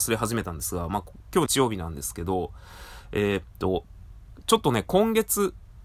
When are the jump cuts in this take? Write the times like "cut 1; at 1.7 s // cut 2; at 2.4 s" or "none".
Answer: cut 1; at 1.5 s